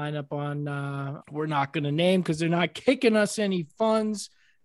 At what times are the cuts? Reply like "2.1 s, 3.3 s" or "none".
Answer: 1.2 s